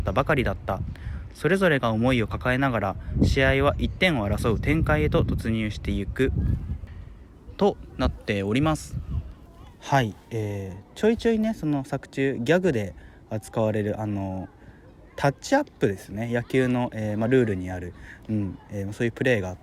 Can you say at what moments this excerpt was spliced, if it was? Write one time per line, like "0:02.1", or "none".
none